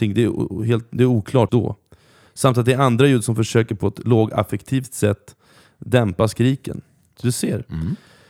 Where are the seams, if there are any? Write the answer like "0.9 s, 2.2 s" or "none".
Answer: 1.5 s, 7.2 s